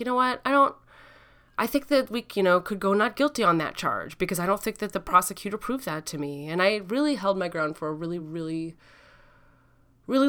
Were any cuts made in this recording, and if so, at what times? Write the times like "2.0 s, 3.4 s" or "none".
none